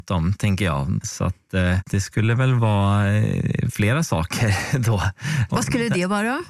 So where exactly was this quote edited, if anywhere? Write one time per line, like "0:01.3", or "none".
0:01.0
0:05.5